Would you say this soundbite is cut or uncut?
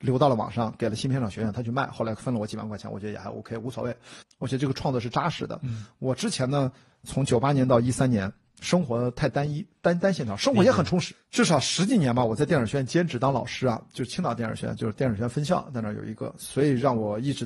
cut